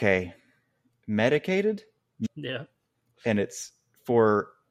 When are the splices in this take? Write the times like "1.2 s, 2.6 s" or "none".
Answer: 2.3 s